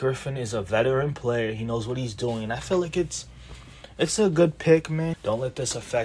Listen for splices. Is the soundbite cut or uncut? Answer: cut